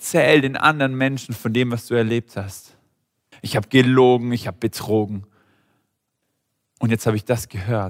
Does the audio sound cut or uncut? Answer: cut